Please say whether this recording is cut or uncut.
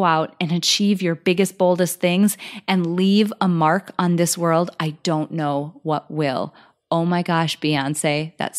uncut